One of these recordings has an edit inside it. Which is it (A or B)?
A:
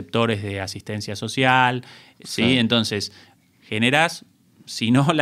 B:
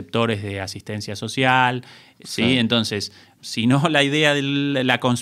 B